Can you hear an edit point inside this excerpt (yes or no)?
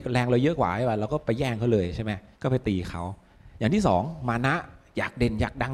yes